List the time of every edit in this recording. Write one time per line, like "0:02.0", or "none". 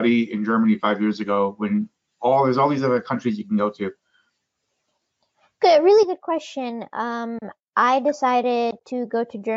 none